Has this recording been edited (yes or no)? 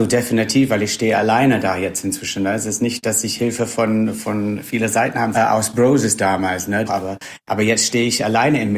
yes